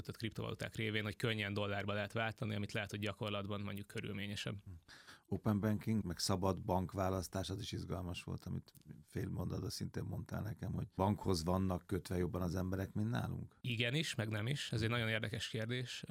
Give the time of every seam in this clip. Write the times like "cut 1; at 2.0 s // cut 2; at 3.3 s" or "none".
cut 1; at 6.0 s